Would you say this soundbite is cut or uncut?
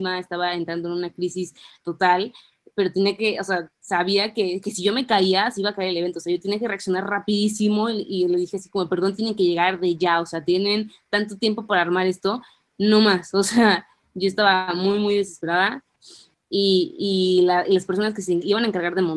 cut